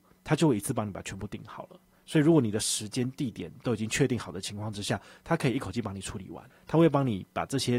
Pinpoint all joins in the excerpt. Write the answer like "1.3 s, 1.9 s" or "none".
none